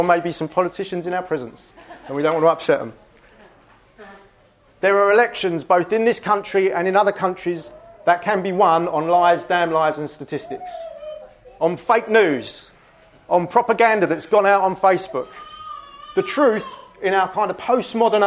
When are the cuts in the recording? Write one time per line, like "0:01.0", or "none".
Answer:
0:04.7